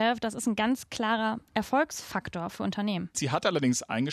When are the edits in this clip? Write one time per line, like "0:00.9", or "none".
0:03.1